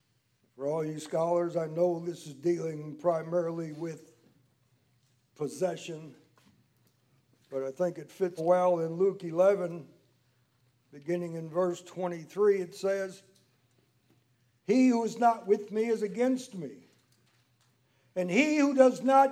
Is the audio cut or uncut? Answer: cut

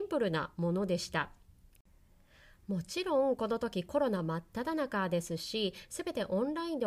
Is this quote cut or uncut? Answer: uncut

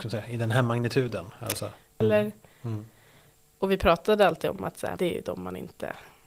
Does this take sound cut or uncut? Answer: cut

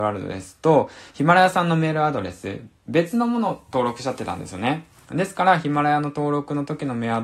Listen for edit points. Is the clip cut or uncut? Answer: uncut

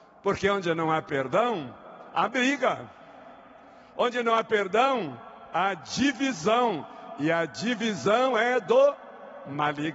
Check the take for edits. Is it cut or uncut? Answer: uncut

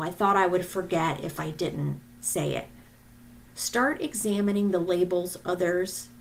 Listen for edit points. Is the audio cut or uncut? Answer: cut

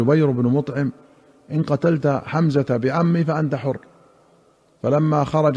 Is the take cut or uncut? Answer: uncut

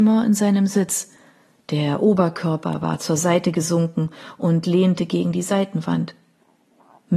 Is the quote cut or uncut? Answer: uncut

